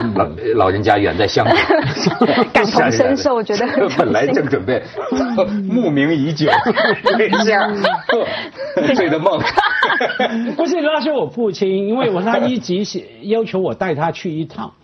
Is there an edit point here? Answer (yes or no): yes